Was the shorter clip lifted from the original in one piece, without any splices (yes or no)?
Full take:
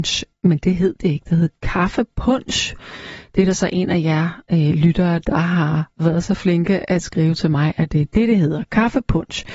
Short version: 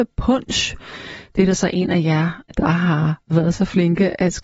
no